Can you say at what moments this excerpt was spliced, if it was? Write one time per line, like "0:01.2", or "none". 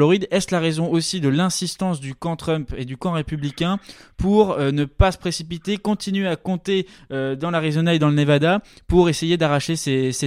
none